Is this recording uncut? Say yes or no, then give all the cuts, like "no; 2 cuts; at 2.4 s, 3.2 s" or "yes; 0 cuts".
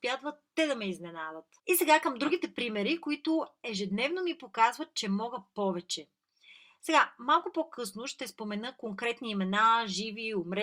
no; 1 cut; at 1.6 s